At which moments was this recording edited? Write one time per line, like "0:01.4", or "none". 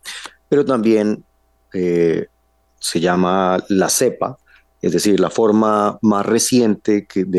none